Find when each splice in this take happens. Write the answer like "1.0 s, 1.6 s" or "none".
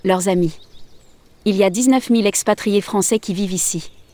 none